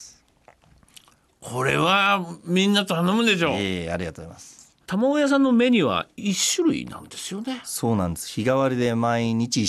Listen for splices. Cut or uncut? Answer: uncut